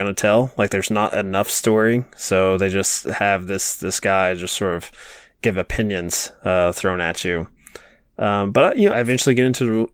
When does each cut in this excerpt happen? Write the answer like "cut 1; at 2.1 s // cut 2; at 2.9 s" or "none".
cut 1; at 8.9 s